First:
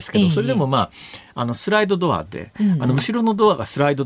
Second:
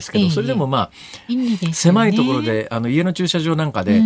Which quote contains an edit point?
second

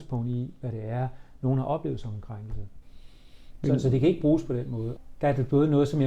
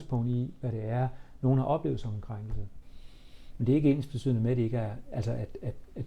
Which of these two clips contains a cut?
second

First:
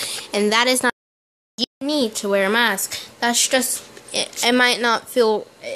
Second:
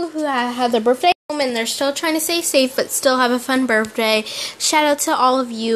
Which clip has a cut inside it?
second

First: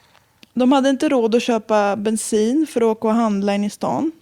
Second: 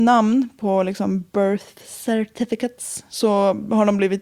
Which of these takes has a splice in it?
second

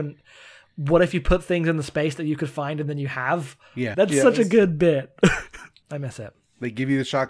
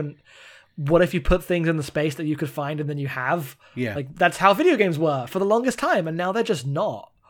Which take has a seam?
first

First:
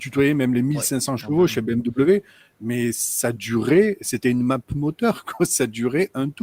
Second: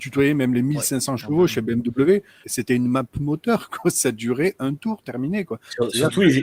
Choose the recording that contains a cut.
second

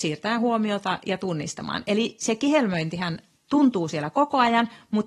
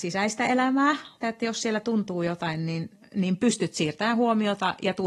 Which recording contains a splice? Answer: second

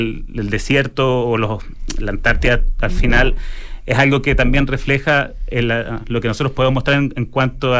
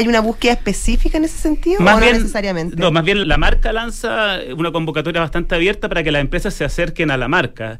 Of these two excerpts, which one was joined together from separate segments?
second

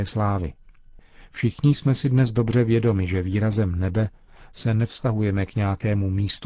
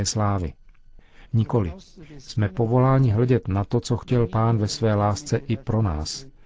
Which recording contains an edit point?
second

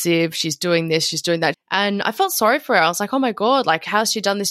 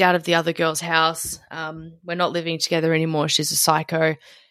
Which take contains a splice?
first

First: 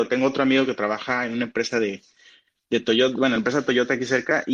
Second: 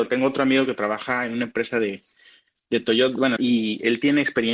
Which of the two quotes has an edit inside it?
second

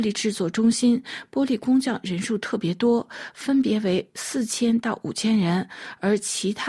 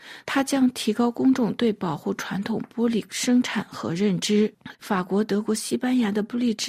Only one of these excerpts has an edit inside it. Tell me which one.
second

